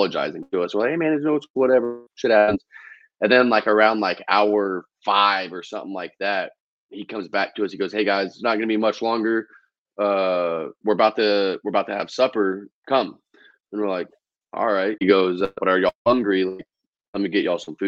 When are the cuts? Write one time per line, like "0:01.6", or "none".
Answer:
0:12.8
0:15.0